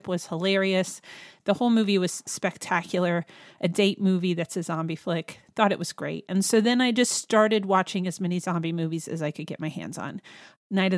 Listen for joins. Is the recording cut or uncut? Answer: uncut